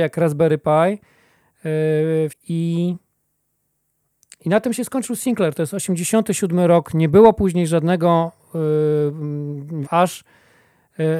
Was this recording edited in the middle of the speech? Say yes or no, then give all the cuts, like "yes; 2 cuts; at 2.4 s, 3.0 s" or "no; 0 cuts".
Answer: yes; 2 cuts; at 2.3 s, 9.8 s